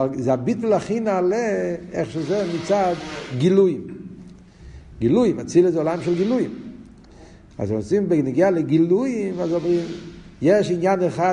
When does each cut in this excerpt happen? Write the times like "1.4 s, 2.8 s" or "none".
7.5 s